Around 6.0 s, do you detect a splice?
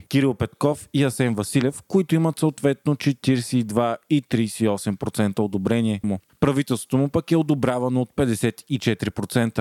yes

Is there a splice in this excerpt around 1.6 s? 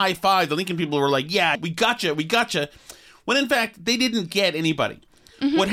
yes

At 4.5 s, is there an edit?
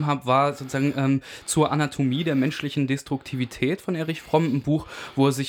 no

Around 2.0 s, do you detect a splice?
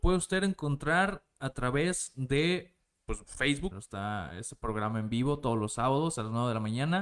no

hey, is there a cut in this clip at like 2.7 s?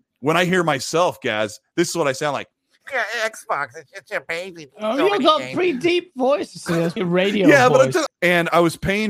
no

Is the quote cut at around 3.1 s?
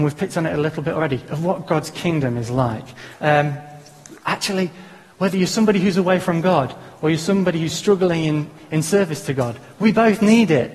yes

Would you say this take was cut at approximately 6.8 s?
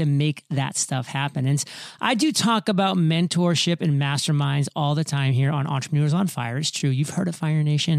no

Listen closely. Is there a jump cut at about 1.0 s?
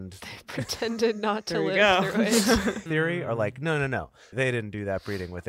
no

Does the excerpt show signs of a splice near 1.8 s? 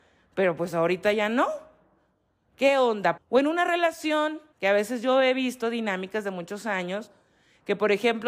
no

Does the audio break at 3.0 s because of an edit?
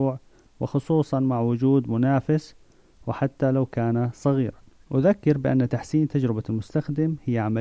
no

